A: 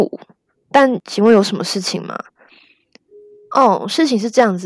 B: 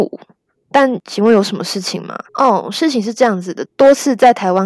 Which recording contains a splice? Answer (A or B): B